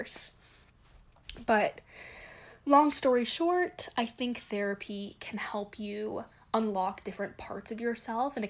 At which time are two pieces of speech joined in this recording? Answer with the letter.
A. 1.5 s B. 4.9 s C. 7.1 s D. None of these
D